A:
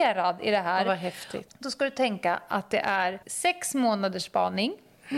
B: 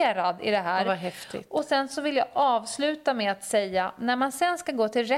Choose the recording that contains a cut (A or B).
A